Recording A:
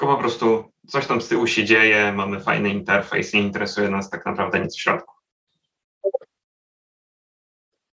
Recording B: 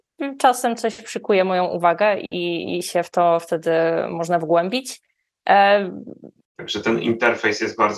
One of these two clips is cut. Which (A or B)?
B